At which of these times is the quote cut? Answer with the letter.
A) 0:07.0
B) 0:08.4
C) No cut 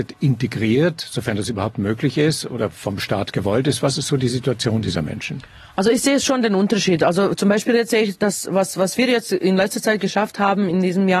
C